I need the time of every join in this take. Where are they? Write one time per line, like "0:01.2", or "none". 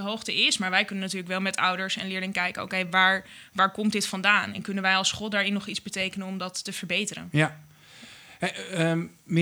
none

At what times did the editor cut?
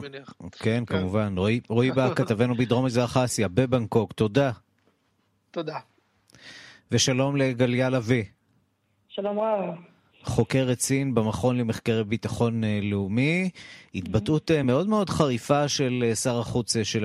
none

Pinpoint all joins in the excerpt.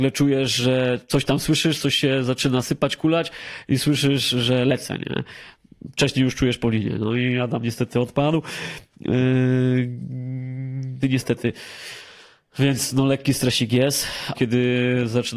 0:11.0
0:14.3

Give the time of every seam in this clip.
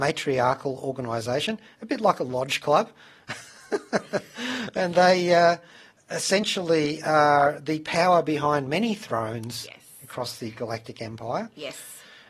none

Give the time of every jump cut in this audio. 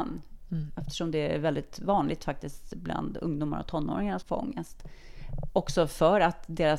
0:04.2

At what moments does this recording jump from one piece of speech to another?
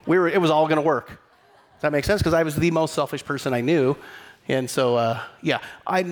none

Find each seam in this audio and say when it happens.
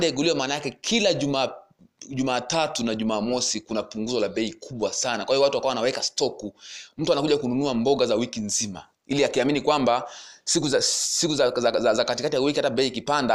0:08.9

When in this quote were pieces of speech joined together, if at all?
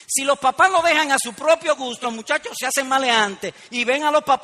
0:02.0

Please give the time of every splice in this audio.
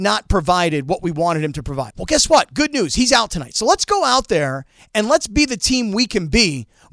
0:01.9

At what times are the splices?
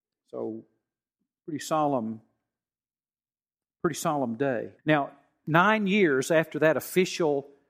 0:04.8

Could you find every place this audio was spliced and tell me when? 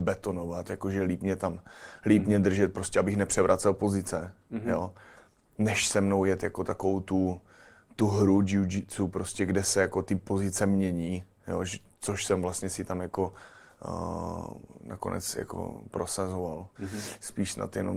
0:16.8

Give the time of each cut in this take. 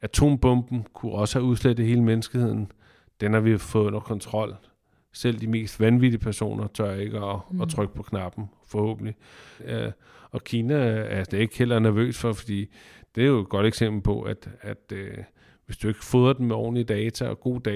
0:09.6

